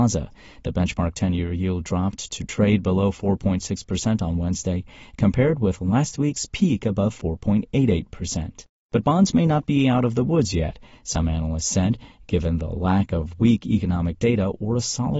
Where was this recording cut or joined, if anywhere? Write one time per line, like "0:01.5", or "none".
none